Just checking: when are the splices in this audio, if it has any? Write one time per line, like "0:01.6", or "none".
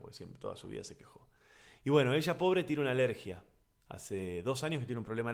none